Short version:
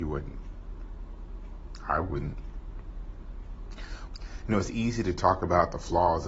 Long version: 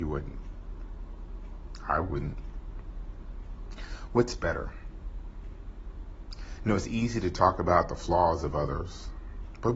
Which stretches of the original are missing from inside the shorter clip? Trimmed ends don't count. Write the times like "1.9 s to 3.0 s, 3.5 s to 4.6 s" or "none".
4.1 s to 6.3 s